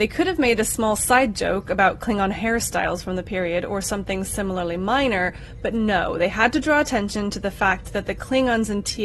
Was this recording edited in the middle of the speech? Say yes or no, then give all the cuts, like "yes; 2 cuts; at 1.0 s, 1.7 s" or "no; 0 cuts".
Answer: no; 0 cuts